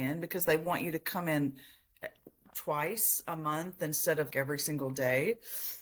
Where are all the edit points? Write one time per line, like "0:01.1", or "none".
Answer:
0:04.3

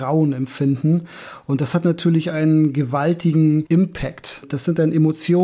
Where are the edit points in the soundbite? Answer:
0:04.4

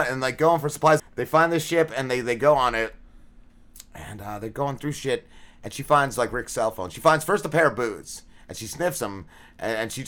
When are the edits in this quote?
0:01.0

